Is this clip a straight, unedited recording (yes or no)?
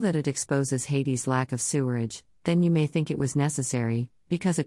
yes